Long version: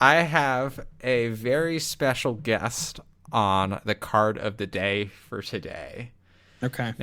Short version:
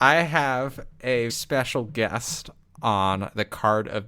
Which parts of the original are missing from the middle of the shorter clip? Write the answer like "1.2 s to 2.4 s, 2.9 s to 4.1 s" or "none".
1.3 s to 1.8 s